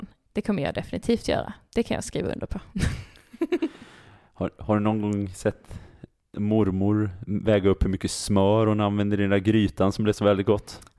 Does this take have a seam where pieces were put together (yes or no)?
no